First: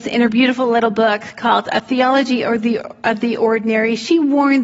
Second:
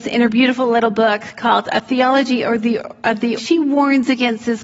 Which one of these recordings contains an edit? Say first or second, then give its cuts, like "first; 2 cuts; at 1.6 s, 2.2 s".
second; 1 cut; at 3.4 s